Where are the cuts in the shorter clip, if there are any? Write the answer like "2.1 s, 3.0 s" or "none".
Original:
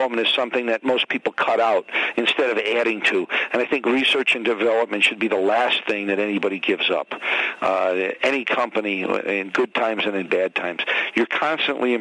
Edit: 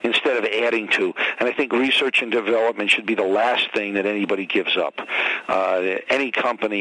none